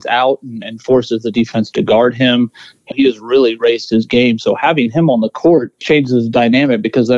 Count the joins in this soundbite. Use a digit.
2